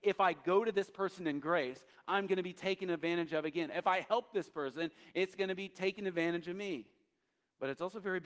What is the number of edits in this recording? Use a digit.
0